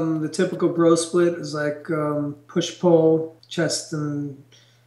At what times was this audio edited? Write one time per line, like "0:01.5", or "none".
0:03.4